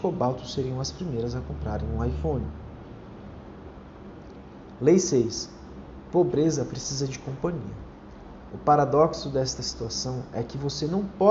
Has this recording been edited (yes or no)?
yes